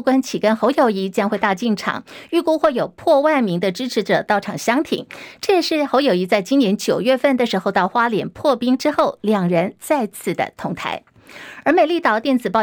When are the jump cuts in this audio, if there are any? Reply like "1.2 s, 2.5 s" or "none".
none